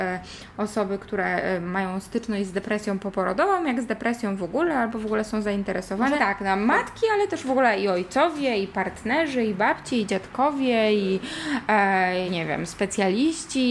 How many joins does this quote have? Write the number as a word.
two